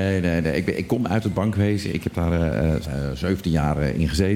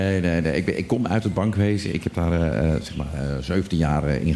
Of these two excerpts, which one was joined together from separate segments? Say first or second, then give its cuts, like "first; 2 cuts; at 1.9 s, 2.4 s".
first; 1 cut; at 2.8 s